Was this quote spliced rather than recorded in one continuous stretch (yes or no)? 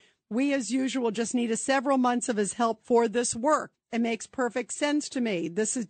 yes